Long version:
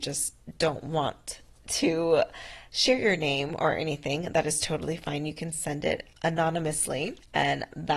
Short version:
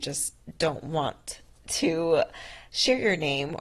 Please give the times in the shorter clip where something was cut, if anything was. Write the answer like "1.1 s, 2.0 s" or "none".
none